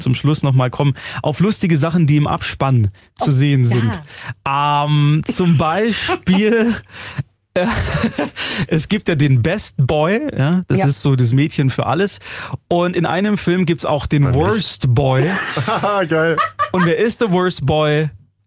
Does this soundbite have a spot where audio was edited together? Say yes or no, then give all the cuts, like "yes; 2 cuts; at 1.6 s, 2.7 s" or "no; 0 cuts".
no; 0 cuts